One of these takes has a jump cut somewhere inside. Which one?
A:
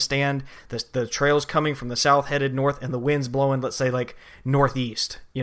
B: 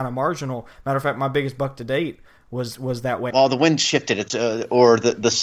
B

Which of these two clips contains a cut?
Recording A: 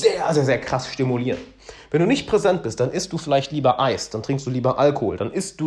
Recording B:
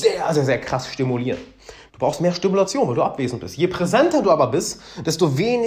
B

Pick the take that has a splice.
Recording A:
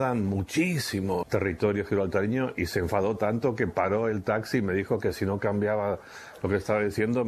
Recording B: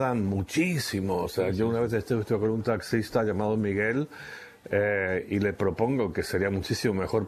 A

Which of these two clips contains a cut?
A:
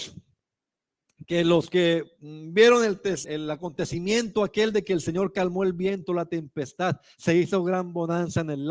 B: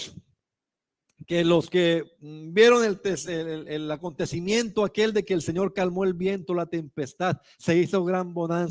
A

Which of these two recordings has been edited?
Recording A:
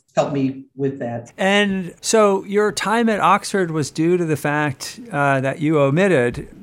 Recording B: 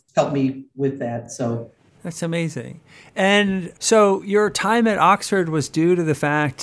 A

